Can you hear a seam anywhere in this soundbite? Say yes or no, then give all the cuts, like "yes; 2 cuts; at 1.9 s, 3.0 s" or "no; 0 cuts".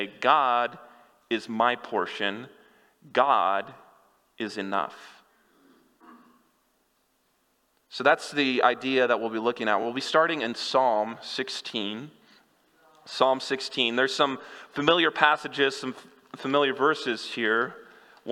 no; 0 cuts